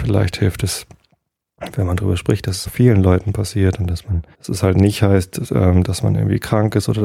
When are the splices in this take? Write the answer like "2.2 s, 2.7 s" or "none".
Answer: 2.6 s, 4.3 s